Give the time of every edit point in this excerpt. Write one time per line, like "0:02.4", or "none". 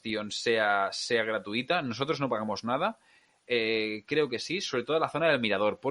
none